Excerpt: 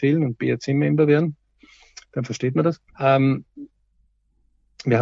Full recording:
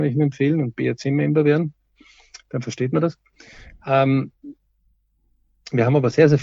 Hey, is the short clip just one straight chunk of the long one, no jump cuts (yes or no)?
no